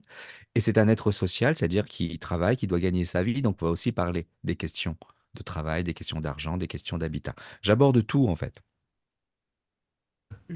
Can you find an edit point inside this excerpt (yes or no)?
no